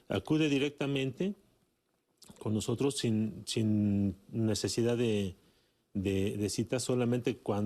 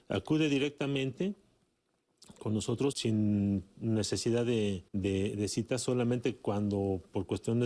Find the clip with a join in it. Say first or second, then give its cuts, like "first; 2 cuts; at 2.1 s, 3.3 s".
second; 2 cuts; at 2.9 s, 4.9 s